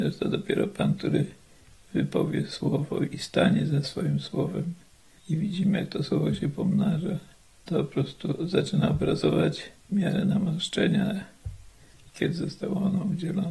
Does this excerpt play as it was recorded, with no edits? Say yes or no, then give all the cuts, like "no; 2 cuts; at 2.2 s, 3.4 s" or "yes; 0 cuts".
no; 2 cuts; at 5.2 s, 12.1 s